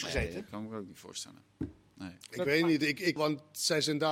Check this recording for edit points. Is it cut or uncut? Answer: cut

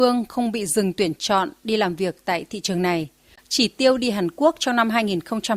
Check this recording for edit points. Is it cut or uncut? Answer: cut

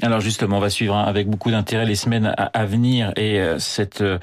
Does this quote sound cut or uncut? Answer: uncut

